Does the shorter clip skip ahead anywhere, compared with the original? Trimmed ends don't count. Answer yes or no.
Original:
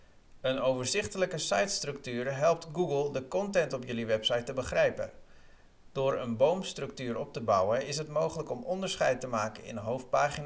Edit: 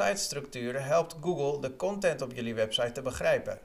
no